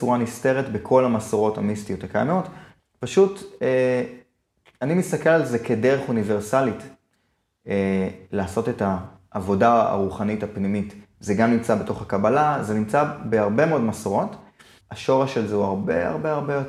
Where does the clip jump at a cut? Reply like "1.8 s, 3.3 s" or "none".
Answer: 2.8 s, 11.1 s, 14.8 s